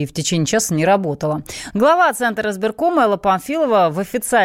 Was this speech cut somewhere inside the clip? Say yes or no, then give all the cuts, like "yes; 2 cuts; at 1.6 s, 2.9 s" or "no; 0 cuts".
yes; 1 cut; at 1.7 s